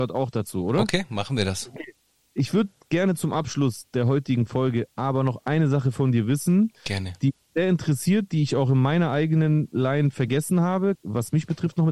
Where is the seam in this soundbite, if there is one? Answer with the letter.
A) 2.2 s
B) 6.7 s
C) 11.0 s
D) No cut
C